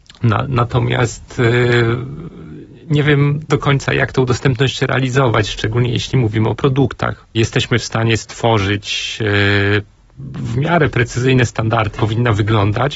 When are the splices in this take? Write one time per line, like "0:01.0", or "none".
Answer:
0:07.3
0:12.0